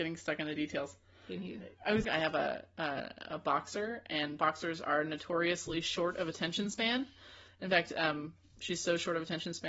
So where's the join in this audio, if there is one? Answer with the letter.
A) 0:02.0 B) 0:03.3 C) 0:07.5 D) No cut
A